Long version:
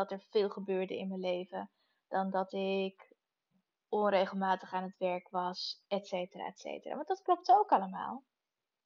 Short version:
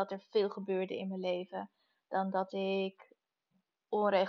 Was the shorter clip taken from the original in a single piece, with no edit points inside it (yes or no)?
yes